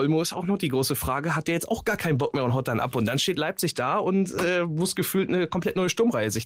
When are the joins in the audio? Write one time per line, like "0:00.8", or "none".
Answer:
none